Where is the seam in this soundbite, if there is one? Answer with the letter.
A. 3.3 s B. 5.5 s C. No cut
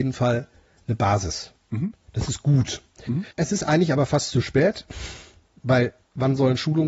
A